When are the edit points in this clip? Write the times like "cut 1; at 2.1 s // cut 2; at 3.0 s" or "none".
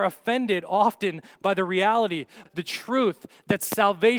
cut 1; at 2.5 s